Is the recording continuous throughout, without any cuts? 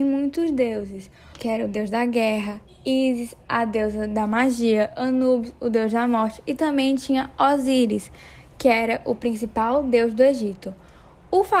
no; 1 cut; at 1.3 s

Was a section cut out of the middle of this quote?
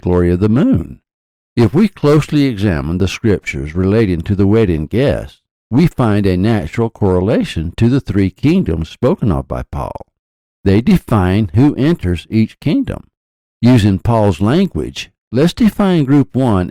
yes; 1 cut; at 1.3 s

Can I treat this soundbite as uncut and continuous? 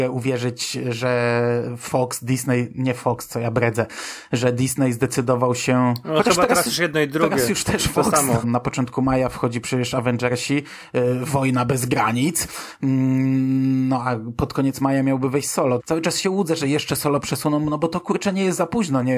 no; 2 cuts; at 8.4 s, 15.8 s

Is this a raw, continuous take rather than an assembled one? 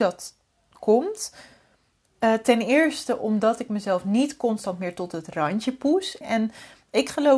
no; 1 cut; at 6.2 s

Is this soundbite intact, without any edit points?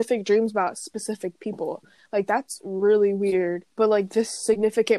no; 1 cut; at 3.7 s

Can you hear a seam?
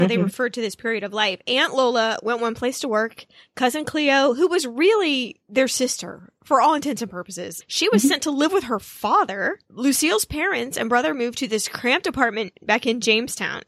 yes; 1 cut; at 7.6 s

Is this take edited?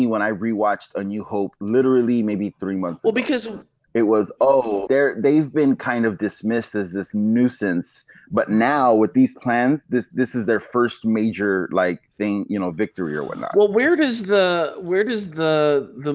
yes; 2 cuts; at 4.9 s, 7.1 s

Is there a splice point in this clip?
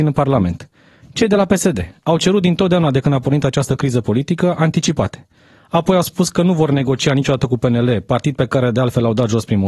no; 0 cuts

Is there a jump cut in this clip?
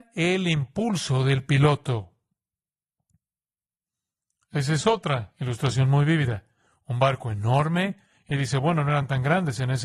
no; 0 cuts

